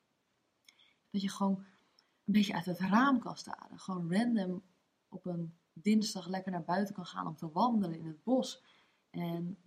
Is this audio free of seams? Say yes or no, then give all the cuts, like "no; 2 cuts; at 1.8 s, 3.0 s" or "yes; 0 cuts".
no; 1 cut; at 1.0 s